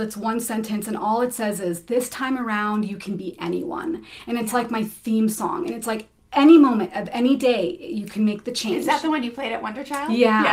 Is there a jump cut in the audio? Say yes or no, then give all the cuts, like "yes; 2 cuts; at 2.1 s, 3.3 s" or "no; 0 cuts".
no; 0 cuts